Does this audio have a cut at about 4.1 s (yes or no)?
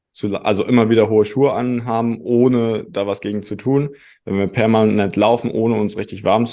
no